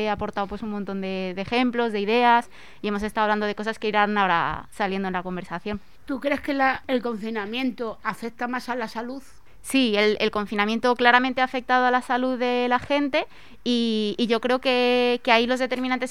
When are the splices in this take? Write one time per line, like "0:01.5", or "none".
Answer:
none